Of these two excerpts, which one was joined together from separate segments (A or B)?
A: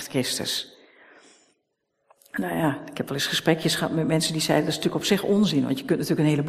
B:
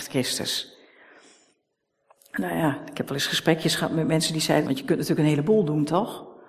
B